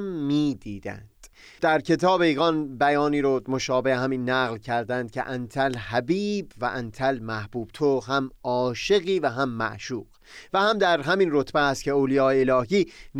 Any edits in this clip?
no; 0 cuts

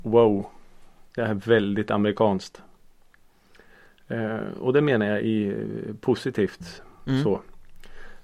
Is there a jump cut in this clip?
no; 0 cuts

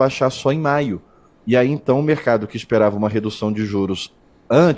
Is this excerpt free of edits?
yes; 0 cuts

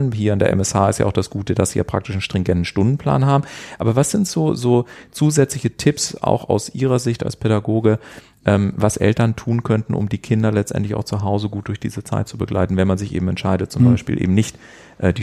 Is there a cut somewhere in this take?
no; 0 cuts

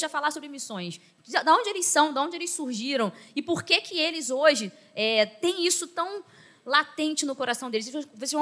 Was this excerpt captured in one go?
yes; 0 cuts

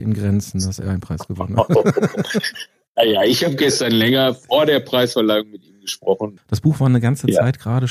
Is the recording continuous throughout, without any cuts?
no; 1 cut; at 6.4 s

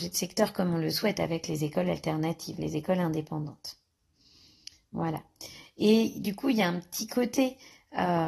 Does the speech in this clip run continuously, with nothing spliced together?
yes; 0 cuts

